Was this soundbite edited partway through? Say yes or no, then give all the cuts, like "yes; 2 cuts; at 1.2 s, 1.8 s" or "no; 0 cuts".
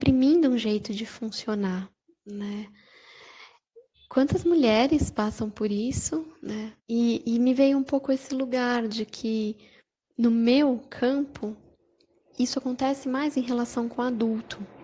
yes; 2 cuts; at 3.9 s, 6.8 s